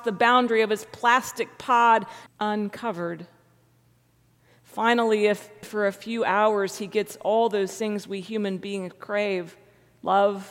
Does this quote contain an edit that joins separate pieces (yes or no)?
yes